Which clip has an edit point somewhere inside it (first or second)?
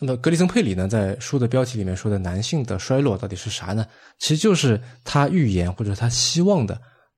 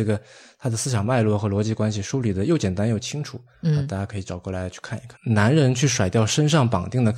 second